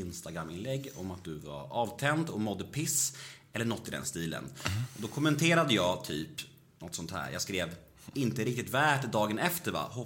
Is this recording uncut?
yes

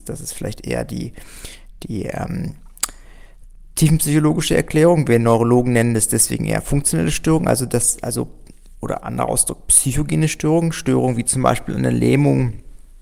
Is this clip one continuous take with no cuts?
yes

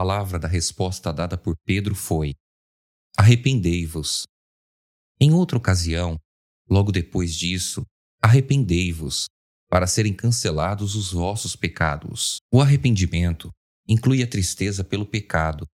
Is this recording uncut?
no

